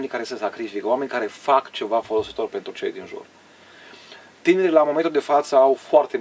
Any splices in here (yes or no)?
no